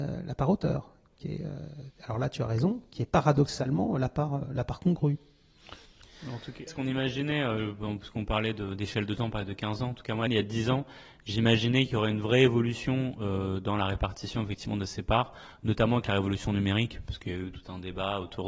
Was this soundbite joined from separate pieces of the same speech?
yes; 2 cuts; at 6.7 s, 10.3 s

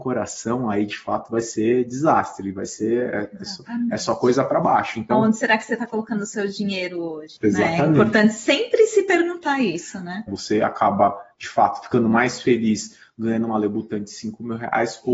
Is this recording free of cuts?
no; 2 cuts; at 7.4 s, 10.3 s

